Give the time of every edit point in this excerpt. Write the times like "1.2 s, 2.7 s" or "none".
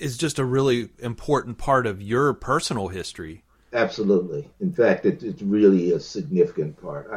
4.5 s